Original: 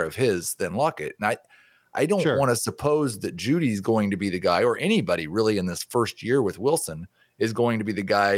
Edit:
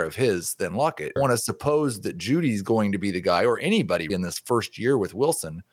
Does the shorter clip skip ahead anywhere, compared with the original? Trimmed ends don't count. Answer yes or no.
yes